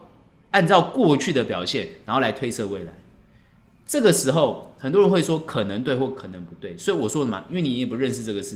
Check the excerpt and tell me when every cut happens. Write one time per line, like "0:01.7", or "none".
0:07.5